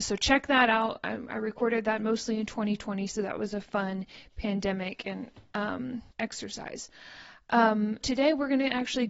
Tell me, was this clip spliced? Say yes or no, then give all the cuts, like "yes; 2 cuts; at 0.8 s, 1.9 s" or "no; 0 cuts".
yes; 2 cuts; at 6.1 s, 8.0 s